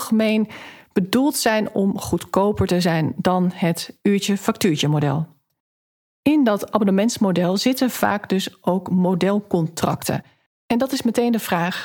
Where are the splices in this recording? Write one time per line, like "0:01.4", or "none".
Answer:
0:10.5